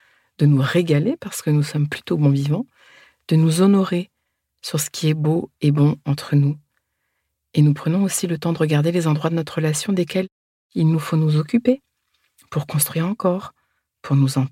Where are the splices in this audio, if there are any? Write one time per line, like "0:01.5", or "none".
none